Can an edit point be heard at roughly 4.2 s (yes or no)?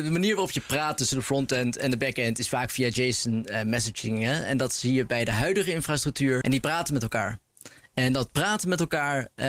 no